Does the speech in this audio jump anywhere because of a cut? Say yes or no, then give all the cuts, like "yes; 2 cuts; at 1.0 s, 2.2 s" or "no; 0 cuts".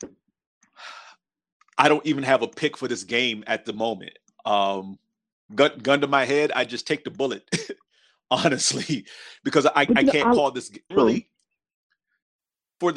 yes; 1 cut; at 10.9 s